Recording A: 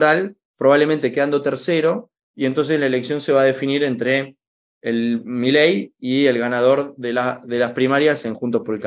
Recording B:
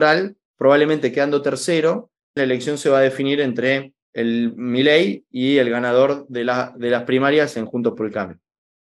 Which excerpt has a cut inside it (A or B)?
B